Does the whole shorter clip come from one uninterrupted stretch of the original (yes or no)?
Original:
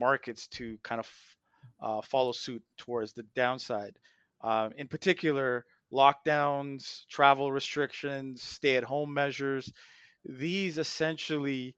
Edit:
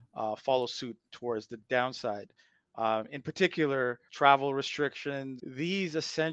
no